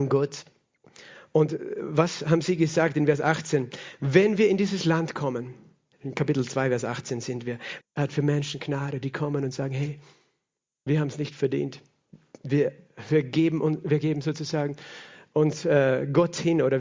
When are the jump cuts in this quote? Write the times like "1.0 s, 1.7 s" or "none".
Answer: 7.8 s